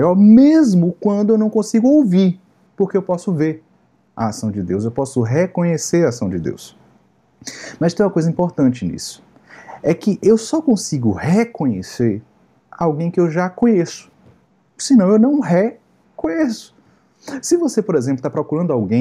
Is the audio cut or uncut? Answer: uncut